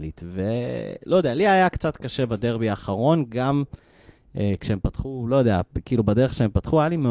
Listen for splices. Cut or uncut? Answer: uncut